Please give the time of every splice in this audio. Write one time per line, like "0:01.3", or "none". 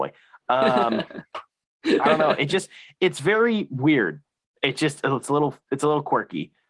0:05.0